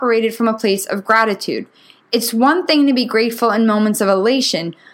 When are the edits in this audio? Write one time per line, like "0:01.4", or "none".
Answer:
none